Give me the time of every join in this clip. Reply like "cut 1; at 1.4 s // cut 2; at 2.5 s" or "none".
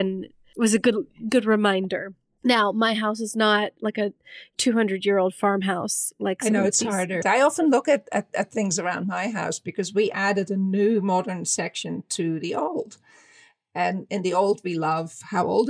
cut 1; at 7.2 s